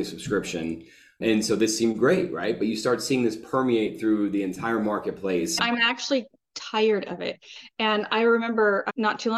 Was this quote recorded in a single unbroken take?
yes; 0 cuts

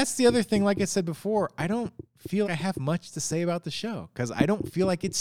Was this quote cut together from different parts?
yes; 1 cut; at 2.4 s

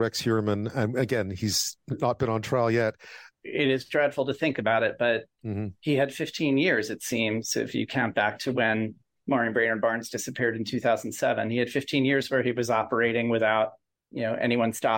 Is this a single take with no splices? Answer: no; 1 cut; at 3.3 s

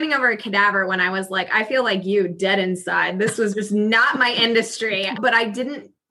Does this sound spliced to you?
yes; 1 cut; at 5.2 s

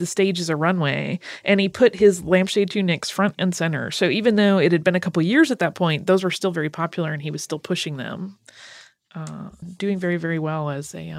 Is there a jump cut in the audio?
yes; 1 cut; at 9.6 s

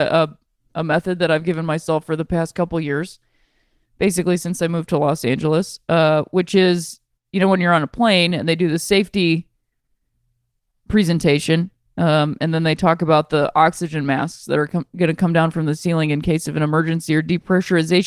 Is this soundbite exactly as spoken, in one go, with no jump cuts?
yes; 0 cuts

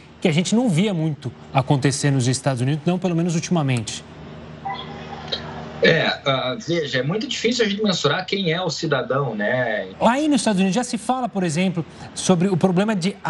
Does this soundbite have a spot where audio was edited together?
yes; 1 cut; at 9.9 s

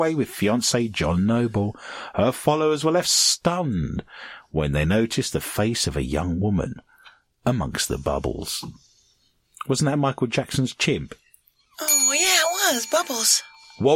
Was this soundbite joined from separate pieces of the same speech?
no; 0 cuts

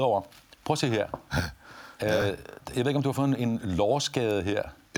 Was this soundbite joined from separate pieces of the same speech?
no; 0 cuts

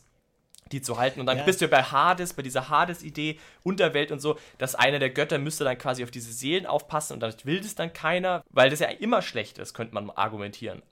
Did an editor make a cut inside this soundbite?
yes; 1 cut; at 8.4 s

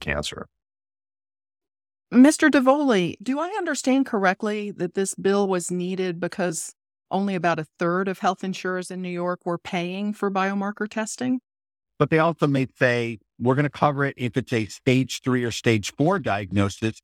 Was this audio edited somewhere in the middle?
yes; 1 cut; at 11.8 s

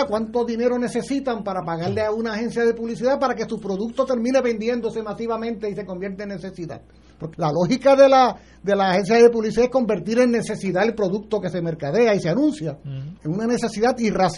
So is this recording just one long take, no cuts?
no; 2 cuts; at 7.3 s, 13.2 s

